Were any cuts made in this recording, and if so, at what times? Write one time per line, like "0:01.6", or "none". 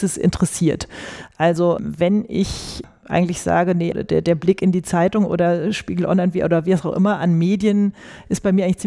0:03.9